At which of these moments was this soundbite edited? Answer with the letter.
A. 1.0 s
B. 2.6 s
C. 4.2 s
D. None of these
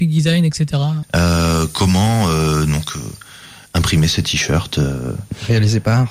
A